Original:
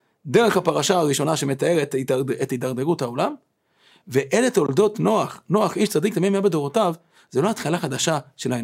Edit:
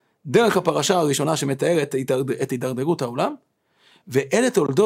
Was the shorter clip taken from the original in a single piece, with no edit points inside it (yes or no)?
yes